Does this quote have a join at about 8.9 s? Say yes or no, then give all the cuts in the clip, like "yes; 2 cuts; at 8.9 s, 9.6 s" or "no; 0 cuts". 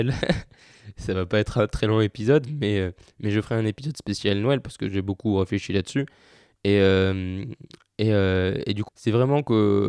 yes; 1 cut; at 8.9 s